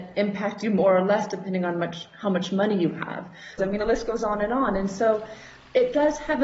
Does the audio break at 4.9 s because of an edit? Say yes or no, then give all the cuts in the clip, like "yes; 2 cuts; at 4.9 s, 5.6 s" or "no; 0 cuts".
no; 1 cut; at 3.6 s